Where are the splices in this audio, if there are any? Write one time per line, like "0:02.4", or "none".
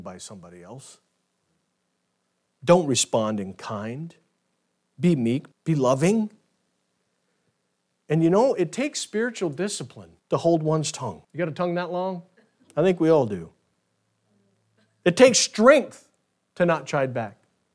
0:05.5
0:10.2
0:11.2